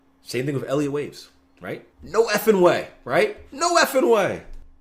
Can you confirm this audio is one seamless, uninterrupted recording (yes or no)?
no